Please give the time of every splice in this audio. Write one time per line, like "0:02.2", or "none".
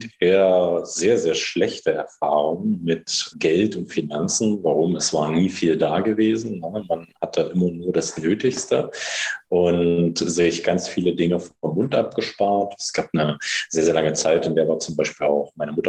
0:03.3